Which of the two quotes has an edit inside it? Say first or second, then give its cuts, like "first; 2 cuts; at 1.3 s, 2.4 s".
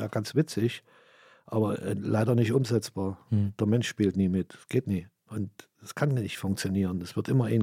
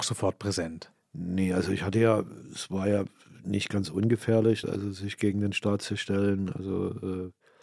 second; 1 cut; at 4.6 s